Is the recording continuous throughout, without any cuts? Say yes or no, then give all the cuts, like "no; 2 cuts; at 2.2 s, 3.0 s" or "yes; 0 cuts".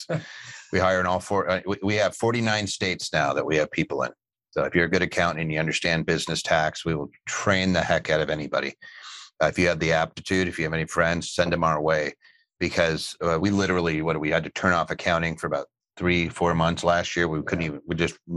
yes; 0 cuts